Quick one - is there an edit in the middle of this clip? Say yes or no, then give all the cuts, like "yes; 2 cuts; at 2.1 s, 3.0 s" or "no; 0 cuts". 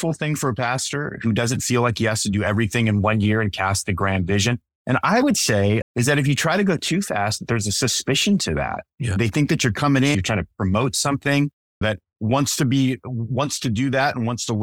yes; 3 cuts; at 5.8 s, 10.1 s, 11.8 s